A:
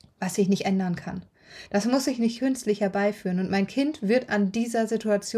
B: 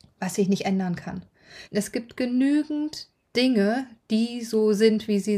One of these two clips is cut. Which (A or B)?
B